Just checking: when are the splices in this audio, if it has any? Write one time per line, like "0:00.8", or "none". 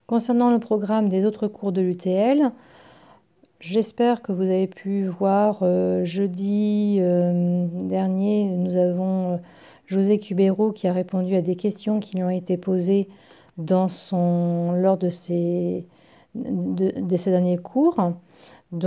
none